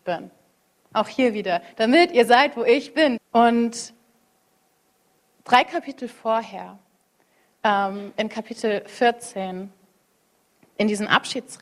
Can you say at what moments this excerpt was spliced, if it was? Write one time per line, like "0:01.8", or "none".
0:03.2

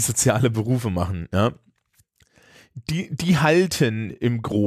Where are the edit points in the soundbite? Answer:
none

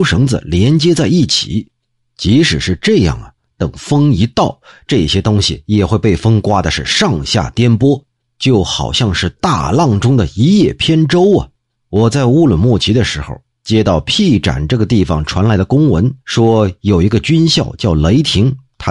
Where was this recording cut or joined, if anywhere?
0:11.8
0:16.2

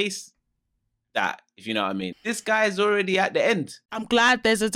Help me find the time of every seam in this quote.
0:02.1

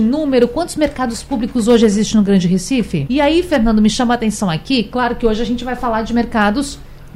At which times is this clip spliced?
0:03.1

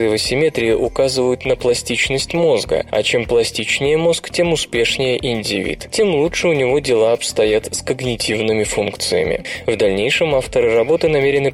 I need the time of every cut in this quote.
none

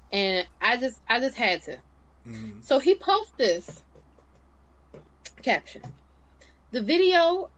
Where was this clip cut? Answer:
none

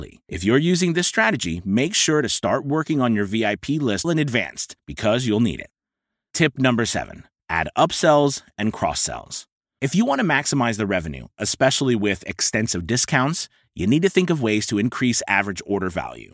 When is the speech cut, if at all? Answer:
0:04.0

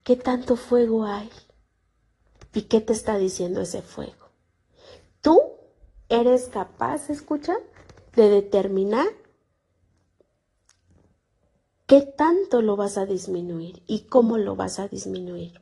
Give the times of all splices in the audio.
none

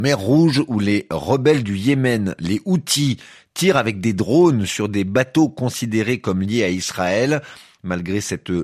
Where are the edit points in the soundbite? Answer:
none

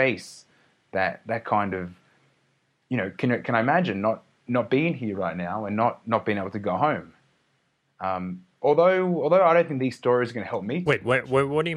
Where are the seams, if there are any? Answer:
none

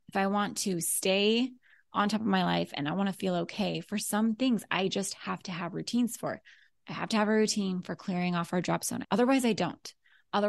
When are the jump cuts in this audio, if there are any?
0:09.0

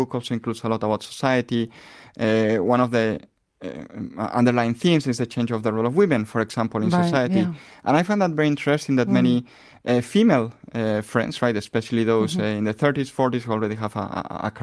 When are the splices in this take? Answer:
none

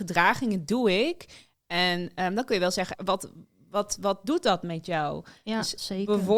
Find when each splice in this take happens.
0:02.9

